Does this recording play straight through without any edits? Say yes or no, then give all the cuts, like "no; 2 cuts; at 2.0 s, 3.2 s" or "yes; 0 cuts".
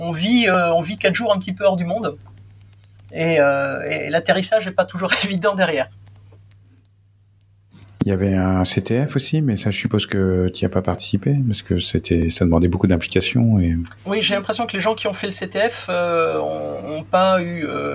no; 1 cut; at 14.0 s